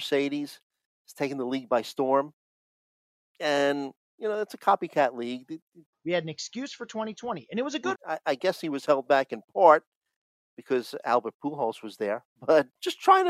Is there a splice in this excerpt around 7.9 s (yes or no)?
yes